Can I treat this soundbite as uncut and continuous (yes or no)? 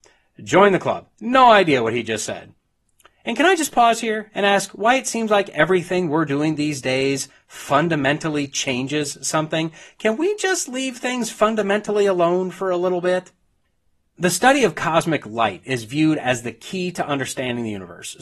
yes